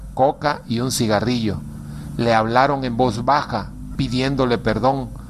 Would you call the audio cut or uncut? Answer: cut